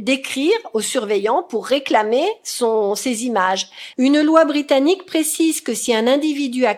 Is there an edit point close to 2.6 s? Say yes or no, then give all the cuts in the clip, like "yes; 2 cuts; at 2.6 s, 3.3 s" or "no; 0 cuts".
no; 1 cut; at 3.9 s